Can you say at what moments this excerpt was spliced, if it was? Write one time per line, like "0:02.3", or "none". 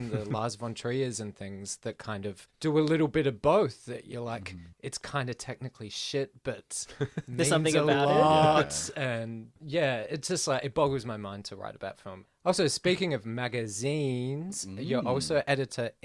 none